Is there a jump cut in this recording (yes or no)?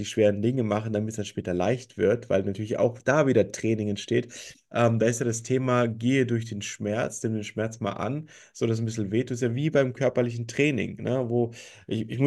no